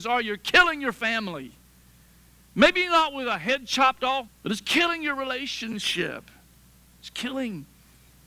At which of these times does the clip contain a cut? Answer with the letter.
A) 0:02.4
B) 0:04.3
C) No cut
B